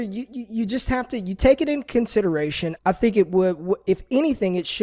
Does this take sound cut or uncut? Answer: cut